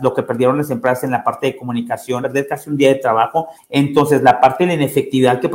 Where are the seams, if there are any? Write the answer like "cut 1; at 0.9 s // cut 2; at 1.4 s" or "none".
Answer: cut 1; at 2.2 s // cut 2; at 3.6 s